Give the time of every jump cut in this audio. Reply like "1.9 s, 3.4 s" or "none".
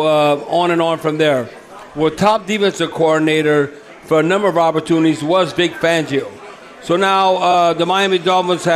none

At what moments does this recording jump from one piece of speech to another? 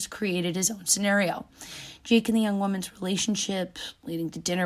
none

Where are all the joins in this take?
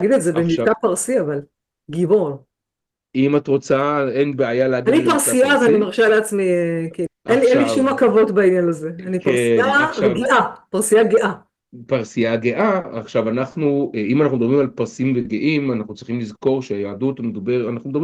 7.1 s

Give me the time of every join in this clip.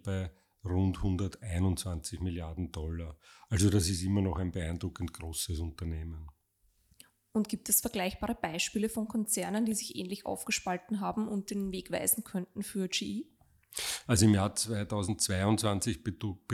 14.0 s

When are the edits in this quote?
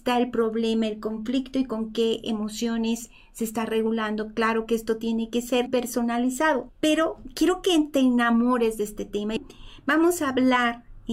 5.7 s, 6.7 s

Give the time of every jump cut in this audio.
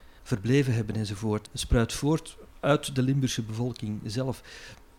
1.5 s

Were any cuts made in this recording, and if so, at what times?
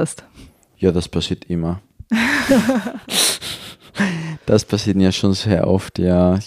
none

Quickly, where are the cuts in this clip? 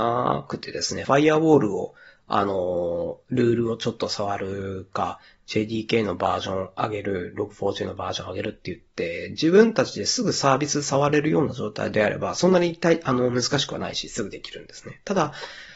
none

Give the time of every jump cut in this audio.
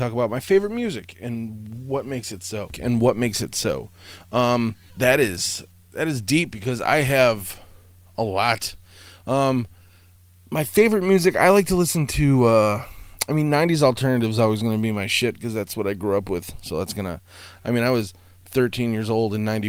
4.9 s

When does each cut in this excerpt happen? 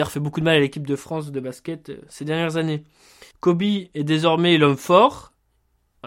3.3 s

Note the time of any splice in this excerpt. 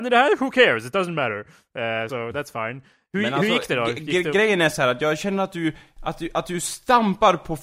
2.1 s

